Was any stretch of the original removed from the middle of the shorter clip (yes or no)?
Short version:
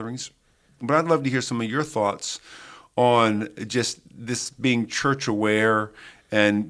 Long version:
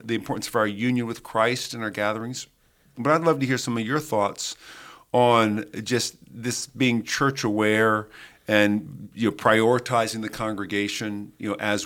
no